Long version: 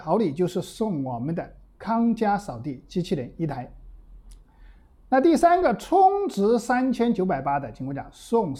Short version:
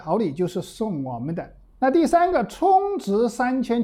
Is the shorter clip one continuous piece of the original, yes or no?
no